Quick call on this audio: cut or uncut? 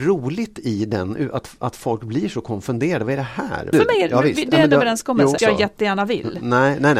cut